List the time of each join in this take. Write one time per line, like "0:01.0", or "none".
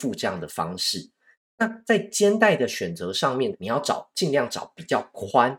0:03.5